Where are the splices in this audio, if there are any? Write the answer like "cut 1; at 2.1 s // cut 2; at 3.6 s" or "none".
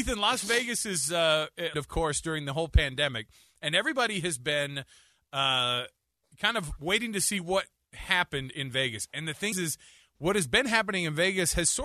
cut 1; at 1.7 s // cut 2; at 9.5 s